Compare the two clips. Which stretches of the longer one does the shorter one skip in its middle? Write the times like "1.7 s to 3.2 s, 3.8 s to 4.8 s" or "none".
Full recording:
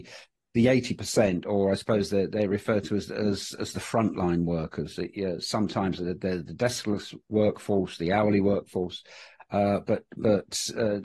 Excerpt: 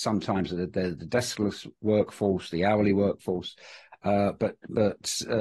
none